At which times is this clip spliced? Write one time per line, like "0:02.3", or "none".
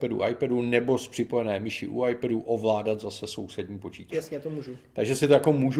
0:04.1